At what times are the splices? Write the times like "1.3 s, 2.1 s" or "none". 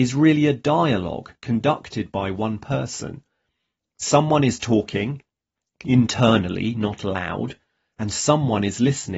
none